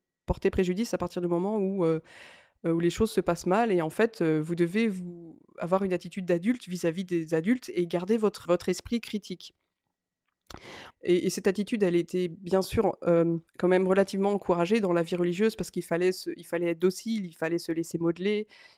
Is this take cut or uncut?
cut